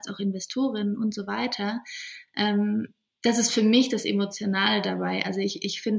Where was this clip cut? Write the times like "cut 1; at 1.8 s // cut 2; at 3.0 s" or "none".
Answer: none